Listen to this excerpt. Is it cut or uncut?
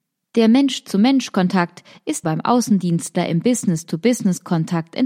cut